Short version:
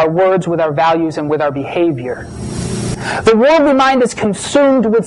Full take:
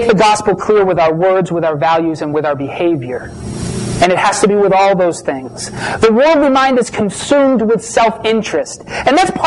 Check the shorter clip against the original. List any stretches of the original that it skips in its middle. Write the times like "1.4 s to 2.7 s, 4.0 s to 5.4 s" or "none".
4.0 s to 5.7 s